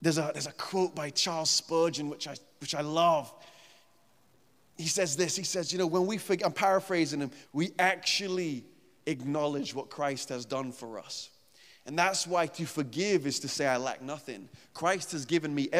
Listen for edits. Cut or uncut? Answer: cut